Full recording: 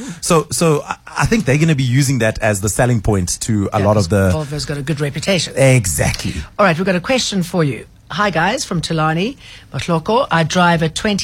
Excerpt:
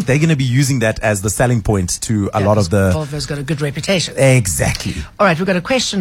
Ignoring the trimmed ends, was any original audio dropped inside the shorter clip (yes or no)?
no